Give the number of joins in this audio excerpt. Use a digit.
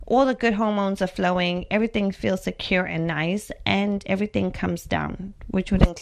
0